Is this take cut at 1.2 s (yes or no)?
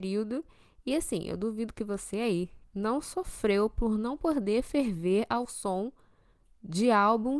no